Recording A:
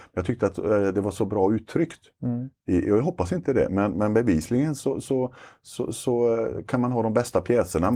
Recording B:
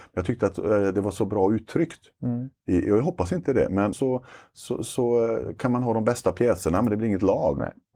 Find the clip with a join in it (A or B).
B